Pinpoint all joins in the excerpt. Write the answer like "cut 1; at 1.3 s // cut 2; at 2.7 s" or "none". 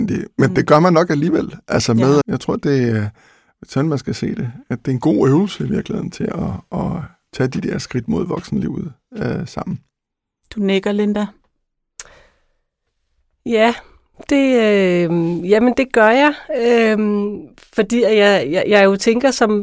cut 1; at 2.2 s